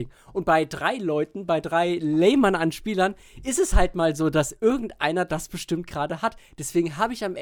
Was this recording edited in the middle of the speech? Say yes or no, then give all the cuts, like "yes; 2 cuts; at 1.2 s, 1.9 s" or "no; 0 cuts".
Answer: no; 0 cuts